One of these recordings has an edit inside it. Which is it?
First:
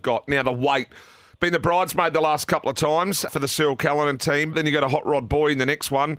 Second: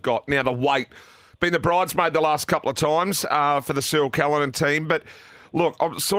first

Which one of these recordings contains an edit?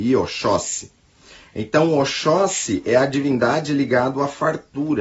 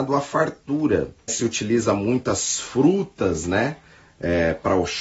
second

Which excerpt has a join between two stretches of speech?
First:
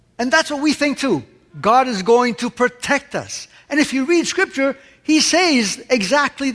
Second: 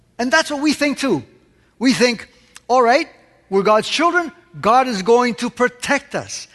first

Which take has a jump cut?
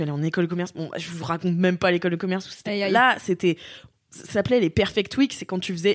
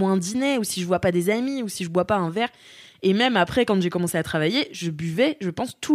first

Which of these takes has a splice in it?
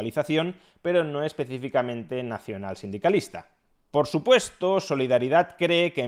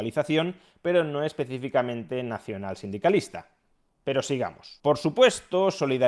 first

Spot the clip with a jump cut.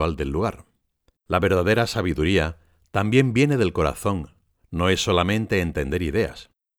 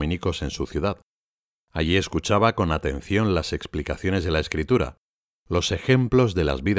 first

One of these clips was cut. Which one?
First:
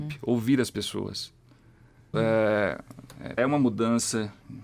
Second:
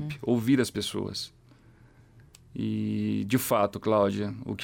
first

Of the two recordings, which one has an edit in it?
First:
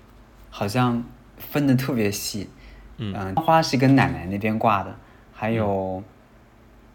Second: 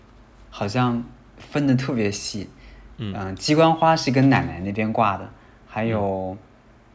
first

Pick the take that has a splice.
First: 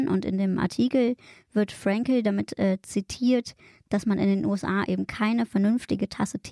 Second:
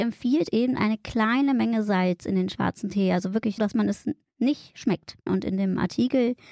second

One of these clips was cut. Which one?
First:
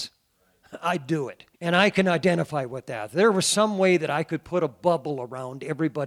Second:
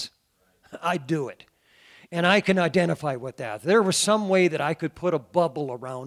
first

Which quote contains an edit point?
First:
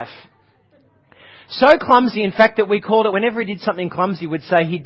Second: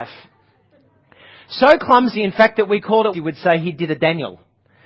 second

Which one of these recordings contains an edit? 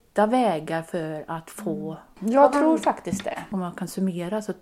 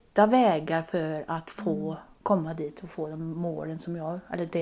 first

